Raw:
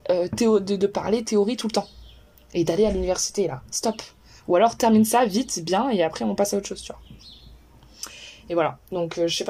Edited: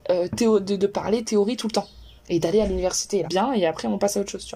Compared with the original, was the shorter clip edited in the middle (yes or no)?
yes